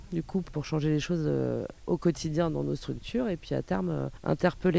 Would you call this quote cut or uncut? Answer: cut